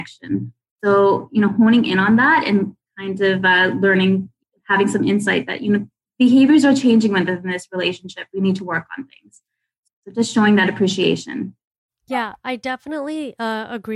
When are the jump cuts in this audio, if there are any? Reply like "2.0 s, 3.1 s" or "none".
9.9 s

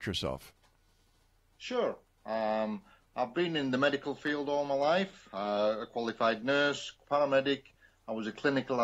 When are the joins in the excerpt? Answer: 7.0 s

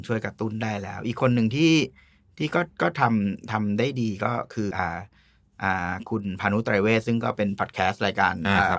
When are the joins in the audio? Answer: 4.7 s

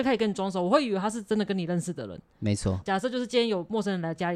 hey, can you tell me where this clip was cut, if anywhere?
2.8 s

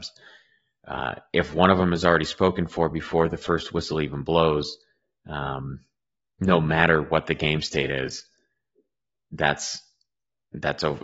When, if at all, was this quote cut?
none

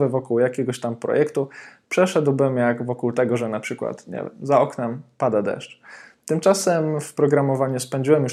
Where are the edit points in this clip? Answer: none

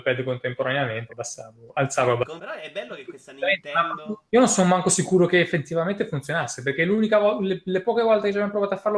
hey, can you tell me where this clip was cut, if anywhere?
1.1 s, 2.4 s, 4.3 s

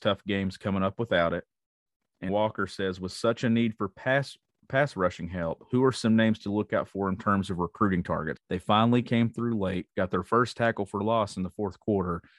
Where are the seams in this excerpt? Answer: 2.3 s, 8.4 s

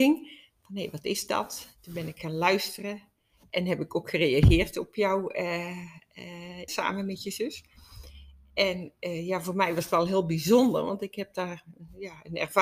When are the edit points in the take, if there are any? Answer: 6.7 s

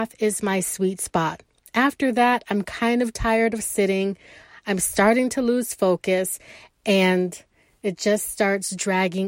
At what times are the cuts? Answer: none

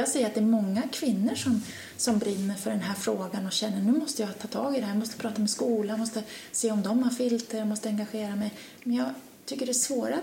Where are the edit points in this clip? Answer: none

